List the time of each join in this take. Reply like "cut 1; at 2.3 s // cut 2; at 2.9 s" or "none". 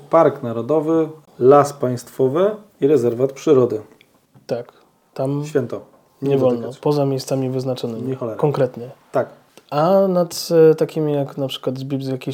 none